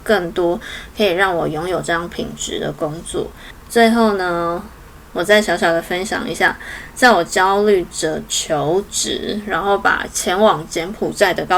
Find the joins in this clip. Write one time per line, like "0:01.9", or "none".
none